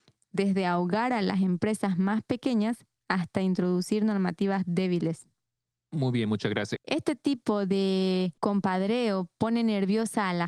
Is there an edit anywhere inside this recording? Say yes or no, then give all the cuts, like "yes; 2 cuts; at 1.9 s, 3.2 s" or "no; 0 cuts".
yes; 2 cuts; at 6.8 s, 8.4 s